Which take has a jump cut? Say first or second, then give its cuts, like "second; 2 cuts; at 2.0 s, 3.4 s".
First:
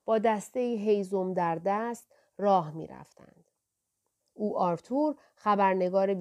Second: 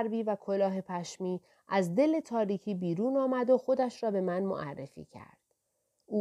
first; 1 cut; at 4.2 s